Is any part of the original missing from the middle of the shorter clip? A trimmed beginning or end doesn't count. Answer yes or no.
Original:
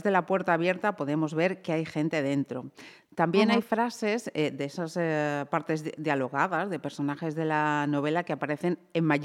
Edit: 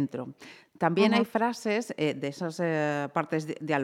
no